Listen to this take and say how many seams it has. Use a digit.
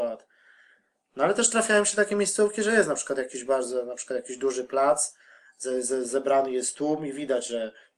0